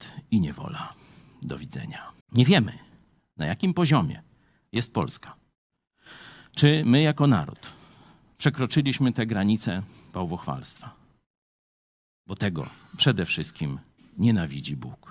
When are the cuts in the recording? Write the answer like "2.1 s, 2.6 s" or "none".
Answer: 2.2 s